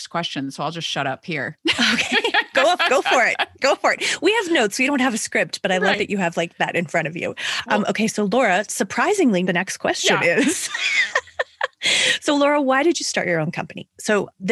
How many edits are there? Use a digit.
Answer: 0